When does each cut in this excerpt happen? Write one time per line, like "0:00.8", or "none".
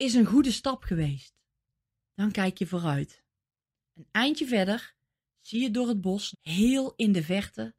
0:02.1
0:03.7
0:06.3